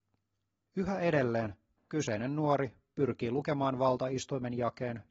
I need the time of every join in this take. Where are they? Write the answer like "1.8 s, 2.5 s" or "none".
1.7 s